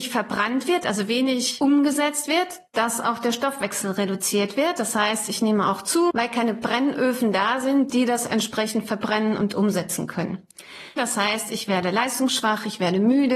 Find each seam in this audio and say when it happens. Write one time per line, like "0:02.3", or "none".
0:06.1
0:11.0